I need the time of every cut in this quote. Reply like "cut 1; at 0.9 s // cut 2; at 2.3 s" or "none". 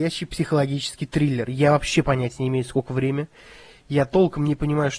none